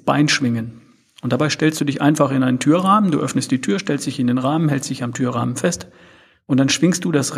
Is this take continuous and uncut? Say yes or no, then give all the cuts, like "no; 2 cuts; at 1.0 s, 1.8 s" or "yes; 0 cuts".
yes; 0 cuts